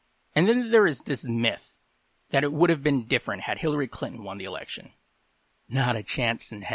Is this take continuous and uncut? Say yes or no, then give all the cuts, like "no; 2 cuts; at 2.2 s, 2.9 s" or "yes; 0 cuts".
yes; 0 cuts